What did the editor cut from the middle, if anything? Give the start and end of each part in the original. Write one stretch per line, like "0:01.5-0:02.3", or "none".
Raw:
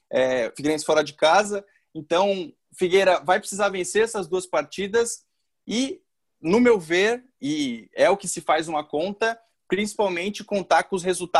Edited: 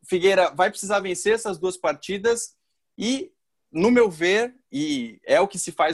none